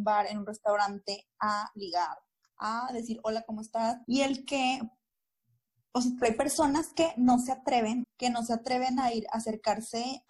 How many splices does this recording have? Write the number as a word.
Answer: three